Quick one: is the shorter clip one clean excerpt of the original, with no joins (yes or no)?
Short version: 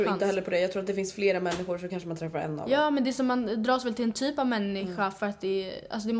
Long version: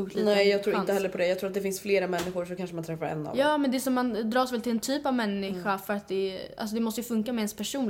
yes